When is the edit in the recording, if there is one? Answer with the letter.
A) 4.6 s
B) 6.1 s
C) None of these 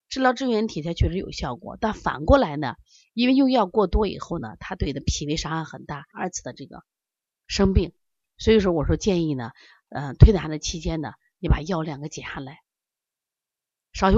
B